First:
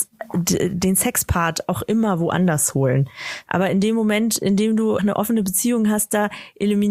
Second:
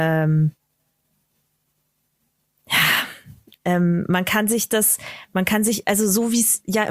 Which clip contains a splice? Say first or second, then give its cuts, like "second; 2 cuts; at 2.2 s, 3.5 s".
first; 2 cuts; at 3.5 s, 5.0 s